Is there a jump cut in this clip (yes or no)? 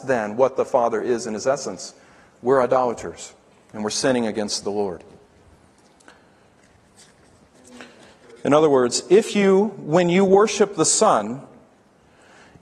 no